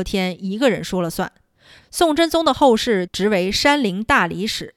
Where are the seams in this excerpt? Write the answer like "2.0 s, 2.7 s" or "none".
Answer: 1.8 s, 3.1 s